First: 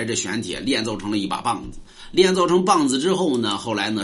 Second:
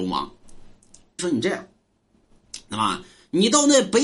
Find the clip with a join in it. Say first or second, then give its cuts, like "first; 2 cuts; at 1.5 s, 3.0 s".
second; 1 cut; at 1.2 s